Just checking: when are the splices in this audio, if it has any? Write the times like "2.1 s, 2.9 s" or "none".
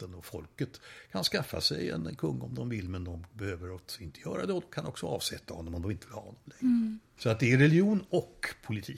7.2 s